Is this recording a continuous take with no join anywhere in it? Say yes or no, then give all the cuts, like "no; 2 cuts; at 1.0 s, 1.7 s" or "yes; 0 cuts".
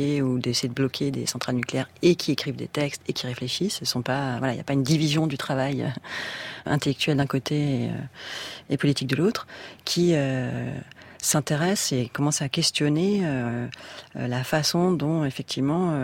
yes; 0 cuts